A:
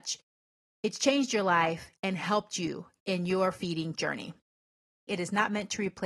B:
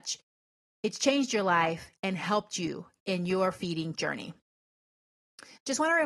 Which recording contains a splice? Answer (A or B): A